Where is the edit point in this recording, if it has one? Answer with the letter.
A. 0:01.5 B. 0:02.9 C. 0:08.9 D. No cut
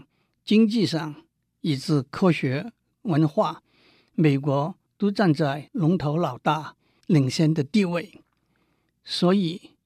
B